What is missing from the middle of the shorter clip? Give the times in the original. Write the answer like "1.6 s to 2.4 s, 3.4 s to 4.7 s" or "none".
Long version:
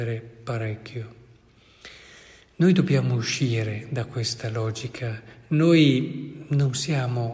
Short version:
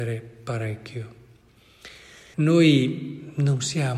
2.3 s to 5.5 s

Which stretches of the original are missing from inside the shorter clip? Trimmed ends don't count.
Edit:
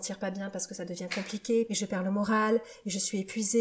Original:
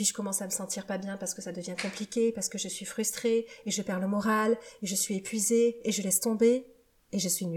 2.3 s to 3.6 s

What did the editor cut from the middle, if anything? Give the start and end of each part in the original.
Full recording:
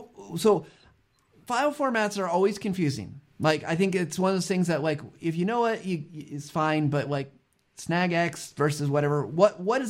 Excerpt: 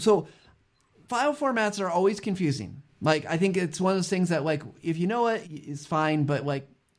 5.8 s to 6.1 s

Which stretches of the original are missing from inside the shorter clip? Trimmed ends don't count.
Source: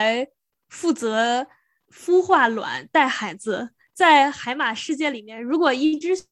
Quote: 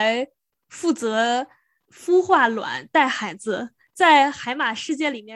none

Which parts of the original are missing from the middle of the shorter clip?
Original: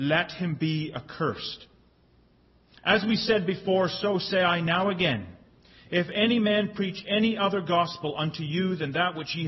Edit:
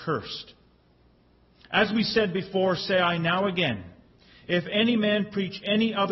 3.9 s to 4.2 s

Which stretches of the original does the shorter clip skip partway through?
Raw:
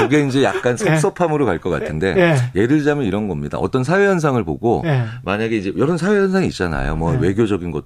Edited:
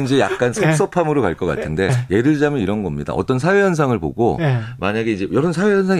2.1 s to 2.3 s

